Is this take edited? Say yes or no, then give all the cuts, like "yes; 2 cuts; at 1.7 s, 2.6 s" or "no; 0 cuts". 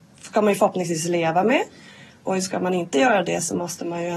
no; 0 cuts